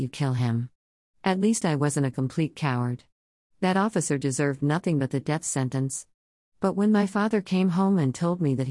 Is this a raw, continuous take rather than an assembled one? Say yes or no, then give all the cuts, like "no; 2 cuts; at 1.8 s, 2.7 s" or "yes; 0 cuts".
yes; 0 cuts